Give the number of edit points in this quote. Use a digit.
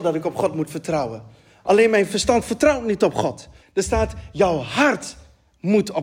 1